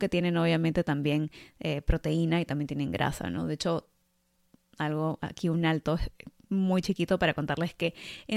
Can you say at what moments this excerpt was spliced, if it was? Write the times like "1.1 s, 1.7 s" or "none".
none